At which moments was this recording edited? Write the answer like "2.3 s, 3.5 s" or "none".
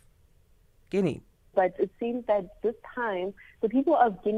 1.5 s

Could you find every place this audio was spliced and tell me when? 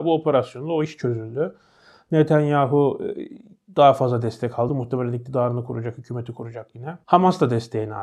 none

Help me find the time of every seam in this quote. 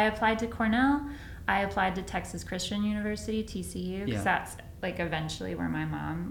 none

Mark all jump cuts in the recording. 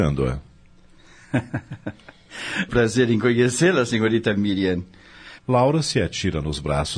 2.7 s, 5.4 s

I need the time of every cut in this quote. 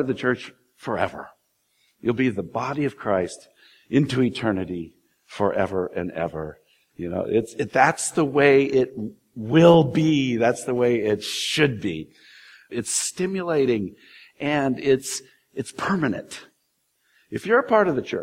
6.9 s, 12.7 s

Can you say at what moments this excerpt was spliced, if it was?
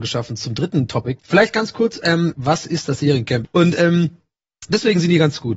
1.2 s, 2.3 s, 3.4 s

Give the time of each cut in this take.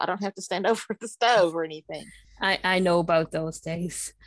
none

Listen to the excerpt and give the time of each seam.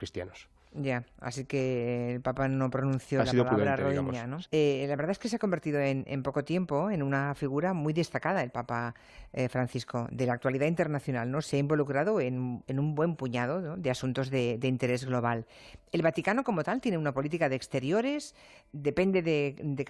4.5 s

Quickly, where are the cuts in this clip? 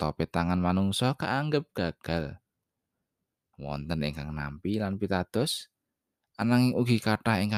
3.5 s

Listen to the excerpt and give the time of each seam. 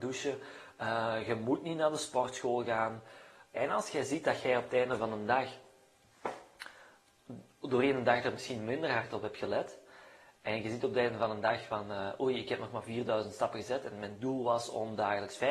3.5 s

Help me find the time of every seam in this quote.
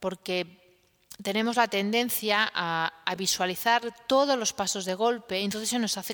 none

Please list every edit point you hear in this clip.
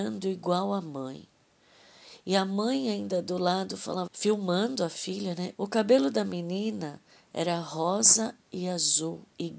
4.1 s, 5.5 s

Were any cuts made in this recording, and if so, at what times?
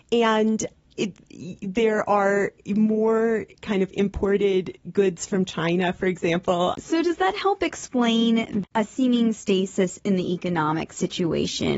6.7 s

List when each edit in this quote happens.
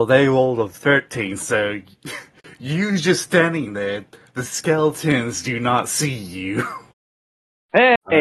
none

